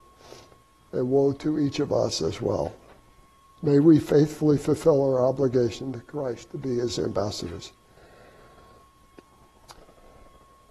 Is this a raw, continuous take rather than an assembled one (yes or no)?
yes